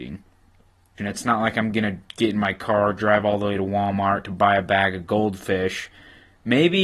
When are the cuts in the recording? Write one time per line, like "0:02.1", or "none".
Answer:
0:01.0